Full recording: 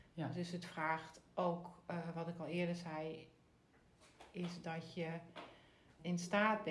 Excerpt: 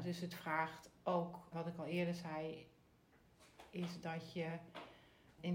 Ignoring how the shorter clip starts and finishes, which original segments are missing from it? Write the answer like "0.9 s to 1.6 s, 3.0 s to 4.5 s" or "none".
1.8 s to 2.1 s